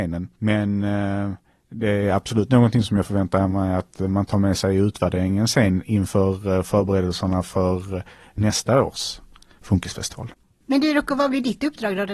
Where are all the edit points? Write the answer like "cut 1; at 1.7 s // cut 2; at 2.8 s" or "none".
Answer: none